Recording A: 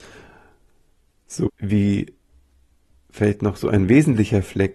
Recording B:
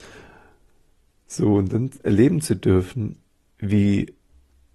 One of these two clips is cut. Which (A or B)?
A